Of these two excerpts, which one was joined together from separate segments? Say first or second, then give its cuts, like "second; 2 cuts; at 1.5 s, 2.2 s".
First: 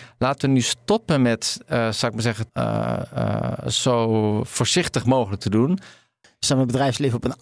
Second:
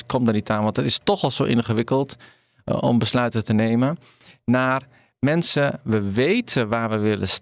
first; 2 cuts; at 2.5 s, 6.2 s